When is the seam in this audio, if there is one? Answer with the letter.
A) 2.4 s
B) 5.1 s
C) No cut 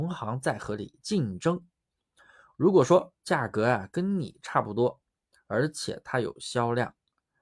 C